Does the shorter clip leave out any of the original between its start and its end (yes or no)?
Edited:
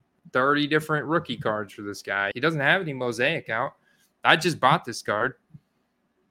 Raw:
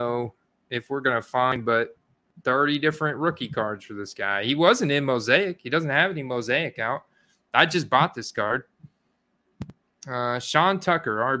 yes